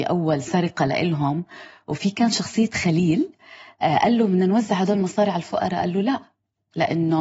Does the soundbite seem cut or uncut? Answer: uncut